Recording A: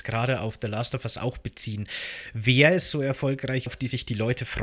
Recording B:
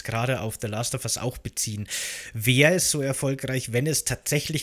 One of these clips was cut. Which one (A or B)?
A